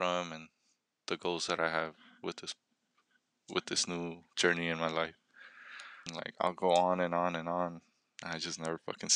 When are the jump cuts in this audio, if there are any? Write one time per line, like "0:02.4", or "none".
0:06.1